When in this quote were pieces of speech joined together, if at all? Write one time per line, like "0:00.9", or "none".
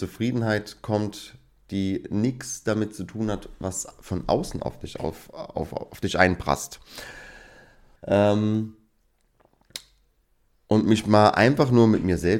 0:08.0